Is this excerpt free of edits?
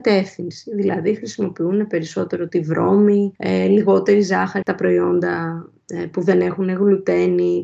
no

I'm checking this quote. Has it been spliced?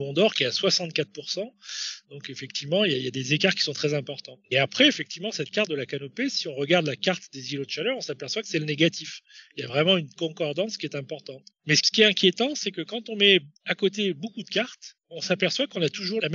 yes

